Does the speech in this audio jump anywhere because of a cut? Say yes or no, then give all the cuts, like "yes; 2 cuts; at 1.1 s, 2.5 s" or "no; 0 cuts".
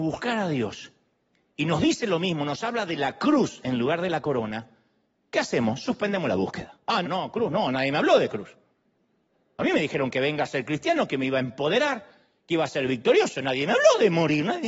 yes; 1 cut; at 7.0 s